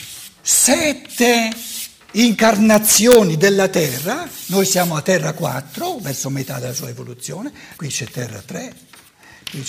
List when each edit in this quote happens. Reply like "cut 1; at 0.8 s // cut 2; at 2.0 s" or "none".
cut 1; at 7.8 s

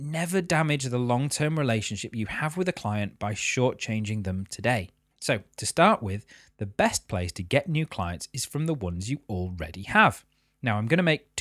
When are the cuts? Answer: cut 1; at 5.1 s

